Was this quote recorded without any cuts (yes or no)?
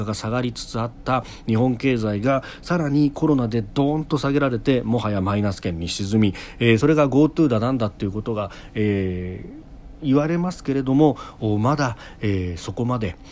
yes